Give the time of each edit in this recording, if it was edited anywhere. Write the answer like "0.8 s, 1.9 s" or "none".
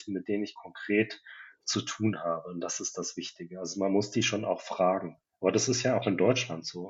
none

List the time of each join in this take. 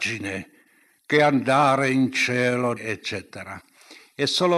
2.8 s

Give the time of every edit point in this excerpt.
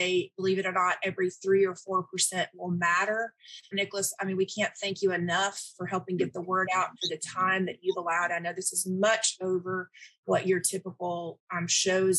3.7 s

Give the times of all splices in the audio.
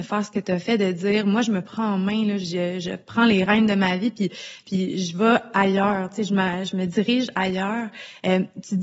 none

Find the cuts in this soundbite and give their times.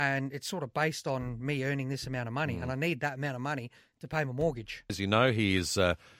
4.9 s

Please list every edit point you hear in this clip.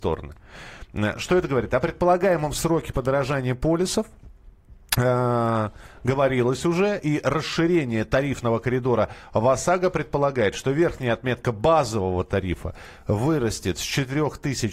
none

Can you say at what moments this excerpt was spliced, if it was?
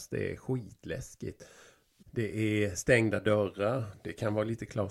2.0 s

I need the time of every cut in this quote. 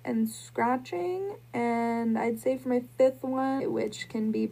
3.6 s

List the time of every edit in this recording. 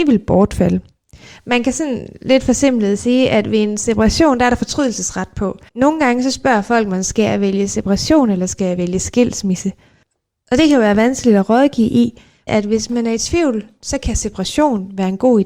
5.7 s, 12.5 s

